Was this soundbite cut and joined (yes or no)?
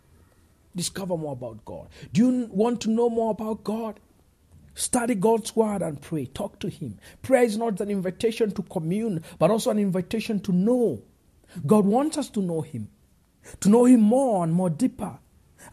yes